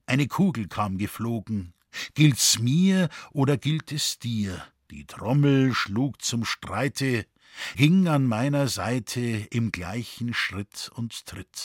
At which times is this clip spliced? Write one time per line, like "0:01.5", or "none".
0:04.9
0:07.7